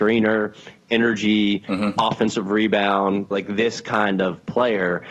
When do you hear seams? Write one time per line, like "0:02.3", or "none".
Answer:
0:03.3